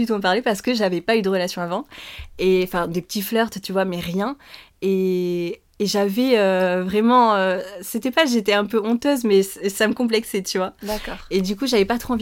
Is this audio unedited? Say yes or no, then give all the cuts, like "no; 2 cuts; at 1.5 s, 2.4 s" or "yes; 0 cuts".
yes; 0 cuts